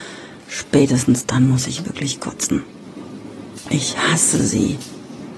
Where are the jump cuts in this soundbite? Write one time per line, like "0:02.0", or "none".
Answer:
0:03.6